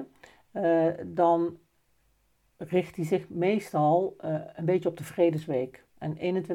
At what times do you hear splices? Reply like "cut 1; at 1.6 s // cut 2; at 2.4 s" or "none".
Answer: none